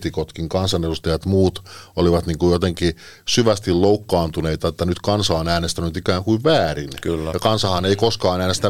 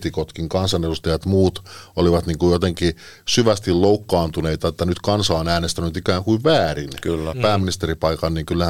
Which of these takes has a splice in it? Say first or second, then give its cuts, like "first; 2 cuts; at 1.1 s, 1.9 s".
second; 1 cut; at 7.3 s